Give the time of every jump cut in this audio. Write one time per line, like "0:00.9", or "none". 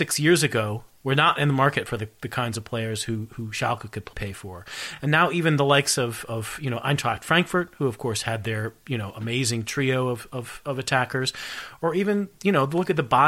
none